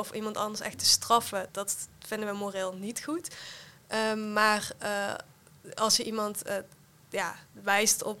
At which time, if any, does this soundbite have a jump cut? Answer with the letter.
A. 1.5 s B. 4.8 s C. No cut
A